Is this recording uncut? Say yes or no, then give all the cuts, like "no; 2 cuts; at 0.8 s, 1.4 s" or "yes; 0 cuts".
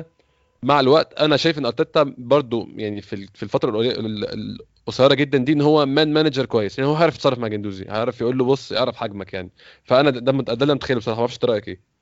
yes; 0 cuts